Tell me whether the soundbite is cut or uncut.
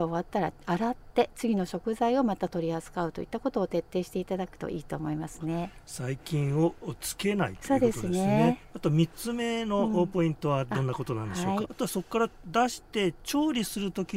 cut